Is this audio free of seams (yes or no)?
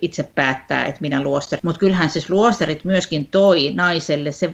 no